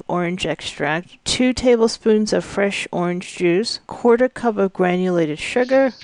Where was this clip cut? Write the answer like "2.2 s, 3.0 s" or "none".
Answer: none

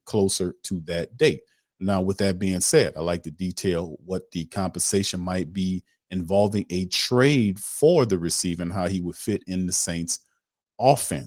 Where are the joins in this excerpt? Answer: none

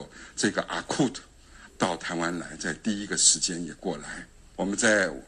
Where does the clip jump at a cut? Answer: 1.7 s

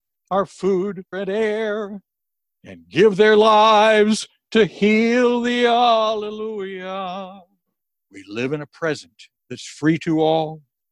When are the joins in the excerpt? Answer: 1.1 s, 9.4 s

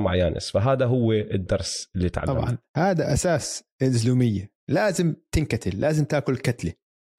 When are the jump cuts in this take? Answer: 2.7 s

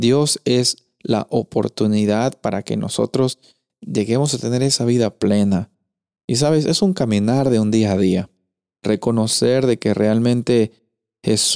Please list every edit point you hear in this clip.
none

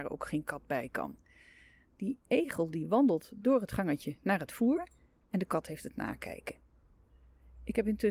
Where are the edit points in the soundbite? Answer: none

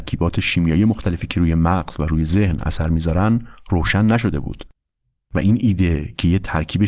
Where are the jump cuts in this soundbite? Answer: none

